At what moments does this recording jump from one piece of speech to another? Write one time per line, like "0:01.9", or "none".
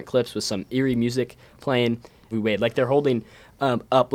0:02.3